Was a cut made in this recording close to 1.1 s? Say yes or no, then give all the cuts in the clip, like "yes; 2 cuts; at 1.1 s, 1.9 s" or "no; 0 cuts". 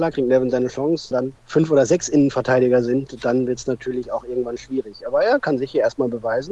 yes; 1 cut; at 1.1 s